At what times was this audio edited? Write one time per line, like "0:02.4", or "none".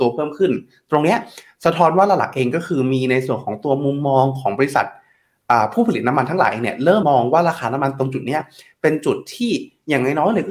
0:07.0